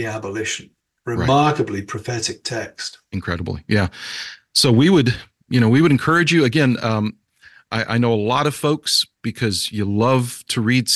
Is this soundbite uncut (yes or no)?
yes